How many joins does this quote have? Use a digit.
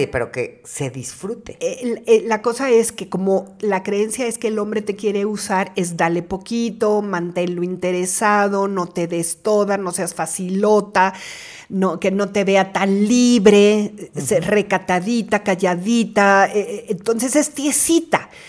0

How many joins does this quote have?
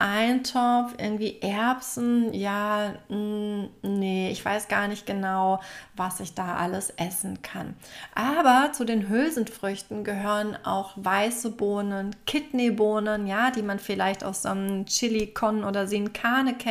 0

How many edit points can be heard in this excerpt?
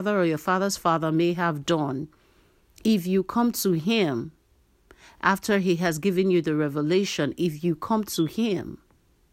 0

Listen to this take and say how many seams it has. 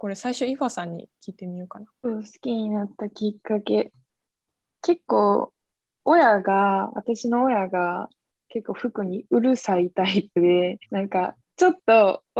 2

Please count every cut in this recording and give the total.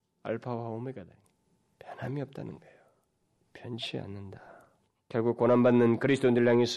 1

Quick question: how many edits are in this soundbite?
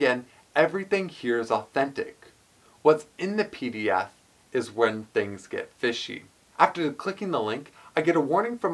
1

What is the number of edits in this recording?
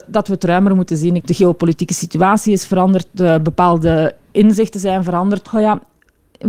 2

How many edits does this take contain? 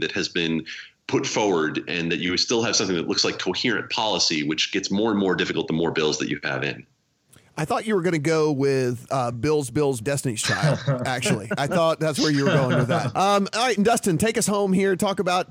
2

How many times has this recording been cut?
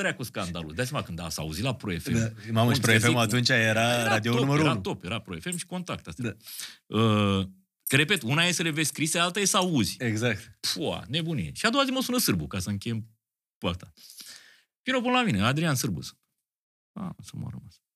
0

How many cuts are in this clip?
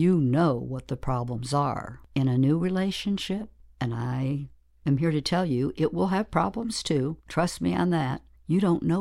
1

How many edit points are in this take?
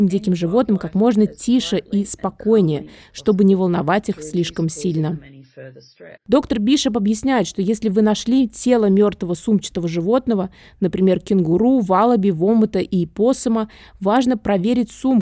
1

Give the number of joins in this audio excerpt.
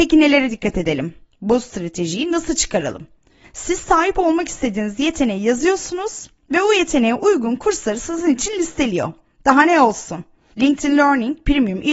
2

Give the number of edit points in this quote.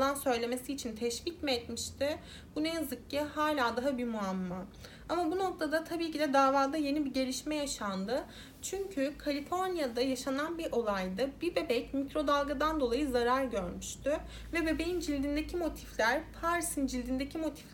0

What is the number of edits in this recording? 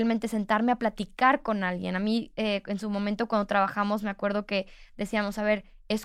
0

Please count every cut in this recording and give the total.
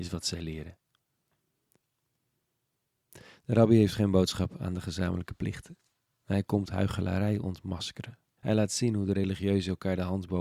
1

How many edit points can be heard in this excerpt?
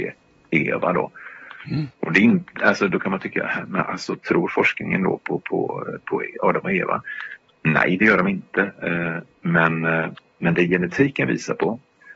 1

